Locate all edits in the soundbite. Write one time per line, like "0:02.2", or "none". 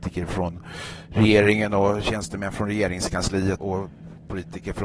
0:03.6